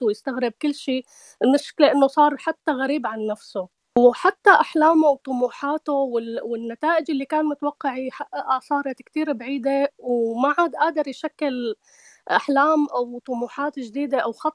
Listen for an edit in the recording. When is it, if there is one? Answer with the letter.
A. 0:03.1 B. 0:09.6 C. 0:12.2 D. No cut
D